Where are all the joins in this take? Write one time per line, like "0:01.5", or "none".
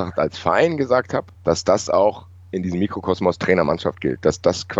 0:01.3